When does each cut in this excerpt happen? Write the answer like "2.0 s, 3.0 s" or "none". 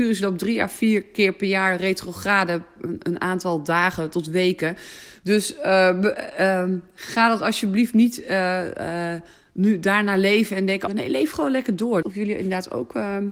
10.9 s, 12.0 s

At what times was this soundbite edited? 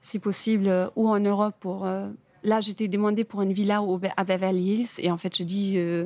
none

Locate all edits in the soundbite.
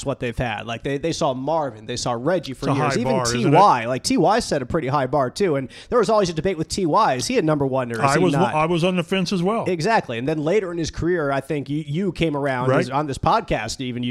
none

